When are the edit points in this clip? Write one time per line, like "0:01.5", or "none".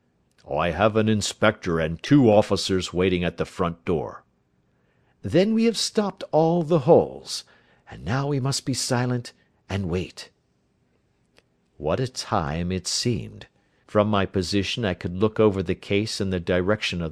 0:13.8